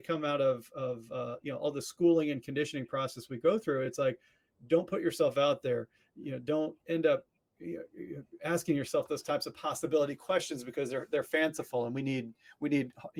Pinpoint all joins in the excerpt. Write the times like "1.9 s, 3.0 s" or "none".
none